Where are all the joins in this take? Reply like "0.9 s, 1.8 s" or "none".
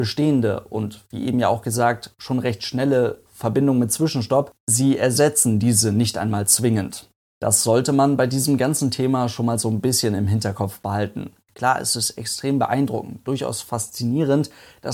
11.4 s